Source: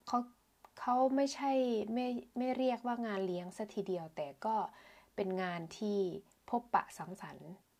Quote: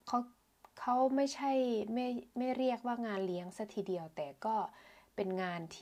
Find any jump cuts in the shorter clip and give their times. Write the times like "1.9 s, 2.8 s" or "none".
none